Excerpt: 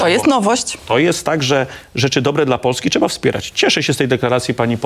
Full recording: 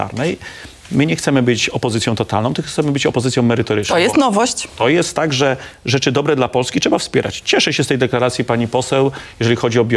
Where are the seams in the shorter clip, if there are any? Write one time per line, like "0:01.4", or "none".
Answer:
none